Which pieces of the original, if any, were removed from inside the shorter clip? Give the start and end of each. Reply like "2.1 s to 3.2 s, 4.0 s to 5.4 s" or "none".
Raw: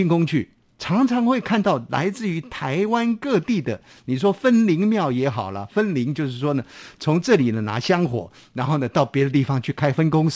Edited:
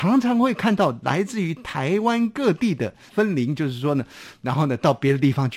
4.0 s to 5.7 s, 6.9 s to 8.5 s